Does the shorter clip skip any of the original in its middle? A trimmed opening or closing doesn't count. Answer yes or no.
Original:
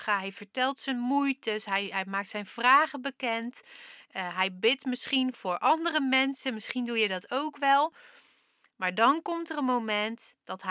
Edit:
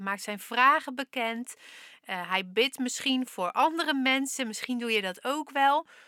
no